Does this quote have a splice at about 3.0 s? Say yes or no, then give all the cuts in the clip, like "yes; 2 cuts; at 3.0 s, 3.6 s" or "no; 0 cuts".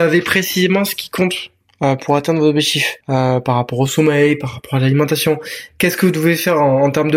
yes; 1 cut; at 3.0 s